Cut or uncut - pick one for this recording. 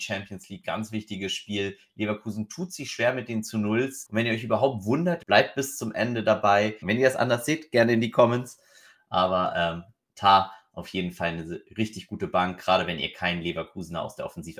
cut